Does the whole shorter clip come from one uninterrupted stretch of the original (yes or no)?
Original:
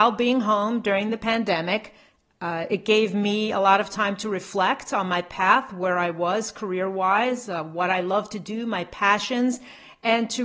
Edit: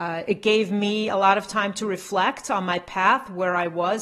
yes